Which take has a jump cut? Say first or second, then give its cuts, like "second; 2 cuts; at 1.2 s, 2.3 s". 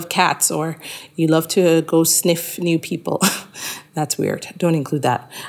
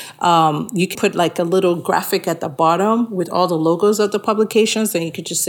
second; 1 cut; at 0.9 s